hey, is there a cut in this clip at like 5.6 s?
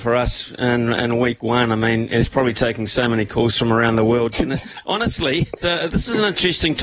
yes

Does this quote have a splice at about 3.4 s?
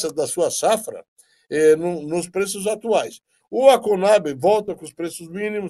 yes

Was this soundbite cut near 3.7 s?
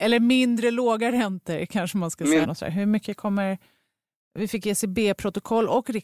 no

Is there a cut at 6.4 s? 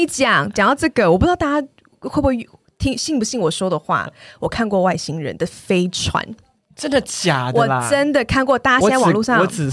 no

